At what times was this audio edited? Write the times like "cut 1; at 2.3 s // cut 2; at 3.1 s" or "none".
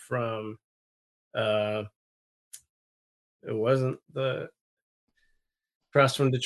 cut 1; at 4.0 s